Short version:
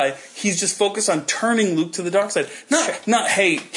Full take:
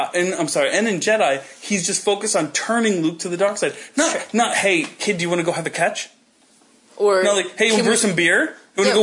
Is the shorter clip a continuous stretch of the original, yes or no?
yes